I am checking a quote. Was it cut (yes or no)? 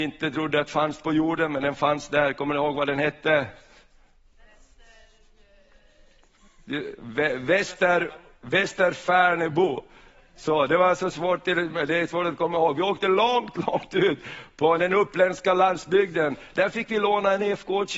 no